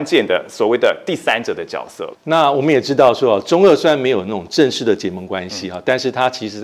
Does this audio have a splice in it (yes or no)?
yes